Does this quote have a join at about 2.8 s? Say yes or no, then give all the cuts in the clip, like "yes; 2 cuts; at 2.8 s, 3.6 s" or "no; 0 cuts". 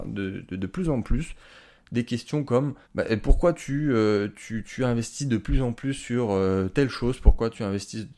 yes; 1 cut; at 2.8 s